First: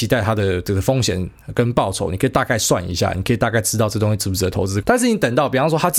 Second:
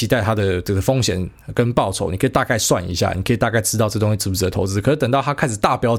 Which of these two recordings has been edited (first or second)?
first